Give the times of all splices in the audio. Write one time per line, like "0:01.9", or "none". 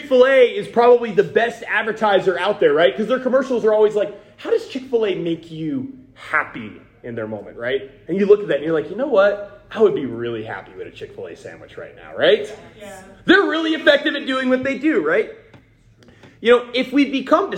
none